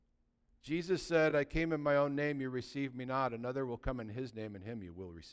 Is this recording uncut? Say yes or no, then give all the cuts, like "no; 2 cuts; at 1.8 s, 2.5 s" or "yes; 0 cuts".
yes; 0 cuts